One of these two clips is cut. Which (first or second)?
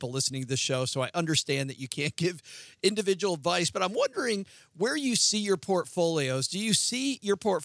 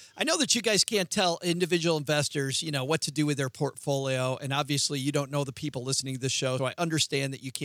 second